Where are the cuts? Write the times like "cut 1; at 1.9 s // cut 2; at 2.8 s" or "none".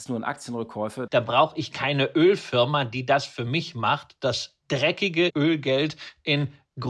cut 1; at 1.1 s // cut 2; at 5.3 s